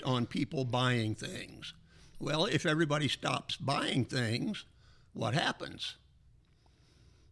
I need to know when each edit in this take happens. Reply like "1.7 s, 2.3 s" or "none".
2.1 s